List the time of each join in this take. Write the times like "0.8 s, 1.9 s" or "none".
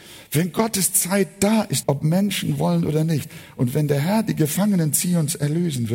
1.8 s